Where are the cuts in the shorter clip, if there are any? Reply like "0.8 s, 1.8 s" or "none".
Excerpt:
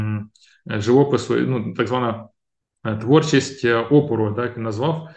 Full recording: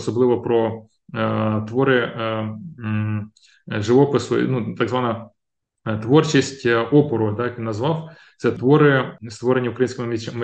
none